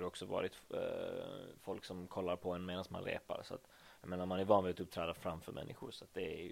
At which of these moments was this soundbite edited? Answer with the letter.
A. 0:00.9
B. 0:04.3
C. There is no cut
C